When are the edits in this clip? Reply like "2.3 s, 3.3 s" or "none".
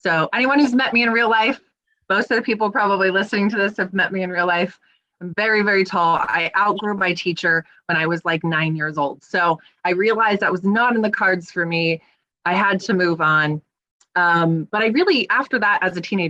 none